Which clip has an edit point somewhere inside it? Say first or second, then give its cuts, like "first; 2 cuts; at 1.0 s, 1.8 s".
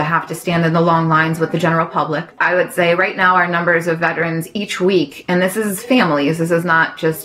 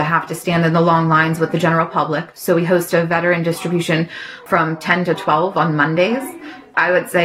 first; 1 cut; at 2.3 s